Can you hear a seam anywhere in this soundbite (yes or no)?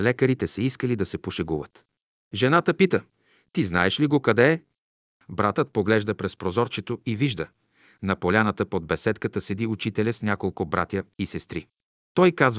no